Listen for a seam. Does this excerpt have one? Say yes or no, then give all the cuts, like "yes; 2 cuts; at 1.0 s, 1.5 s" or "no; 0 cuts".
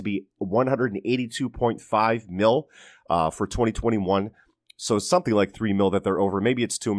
no; 0 cuts